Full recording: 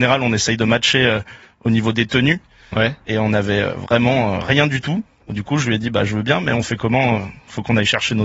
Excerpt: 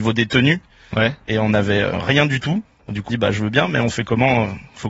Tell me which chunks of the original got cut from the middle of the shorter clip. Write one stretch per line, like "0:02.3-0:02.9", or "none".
0:03.7-0:04.3
0:05.5-0:05.8